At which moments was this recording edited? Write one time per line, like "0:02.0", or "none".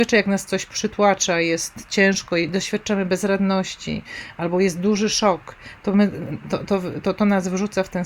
none